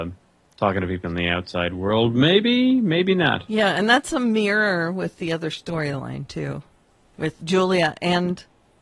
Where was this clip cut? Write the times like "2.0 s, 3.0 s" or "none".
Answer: 7.4 s